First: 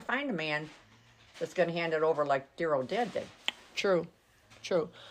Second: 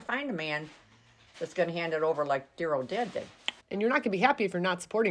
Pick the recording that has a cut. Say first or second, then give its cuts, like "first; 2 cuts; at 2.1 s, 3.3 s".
second; 1 cut; at 3.6 s